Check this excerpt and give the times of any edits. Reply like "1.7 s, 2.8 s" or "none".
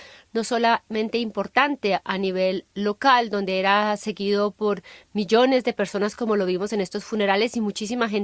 none